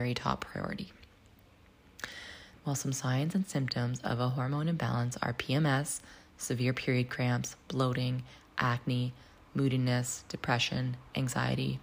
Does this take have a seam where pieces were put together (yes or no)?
yes